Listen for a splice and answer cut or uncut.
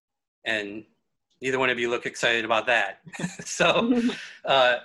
uncut